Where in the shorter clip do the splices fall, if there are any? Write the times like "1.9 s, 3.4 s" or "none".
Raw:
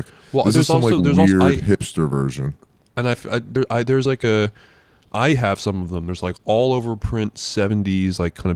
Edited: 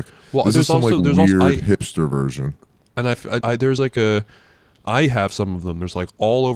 3.4 s